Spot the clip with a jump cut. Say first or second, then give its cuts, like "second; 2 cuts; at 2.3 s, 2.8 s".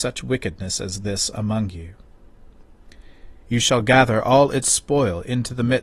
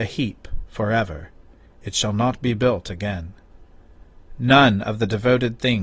first; 1 cut; at 3.4 s